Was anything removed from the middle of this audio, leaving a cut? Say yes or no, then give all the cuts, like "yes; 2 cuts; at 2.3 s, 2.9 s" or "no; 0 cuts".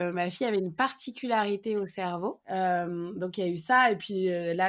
yes; 1 cut; at 2.4 s